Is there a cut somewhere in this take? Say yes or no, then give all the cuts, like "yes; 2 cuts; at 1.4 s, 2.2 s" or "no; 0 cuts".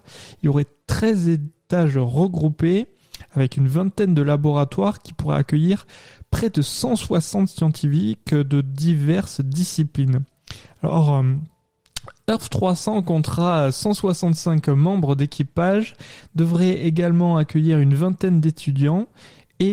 no; 0 cuts